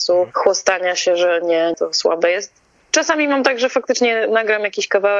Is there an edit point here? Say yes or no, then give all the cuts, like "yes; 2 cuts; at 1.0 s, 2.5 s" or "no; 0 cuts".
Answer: yes; 1 cut; at 1.7 s